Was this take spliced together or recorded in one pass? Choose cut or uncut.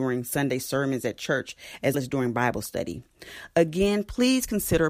cut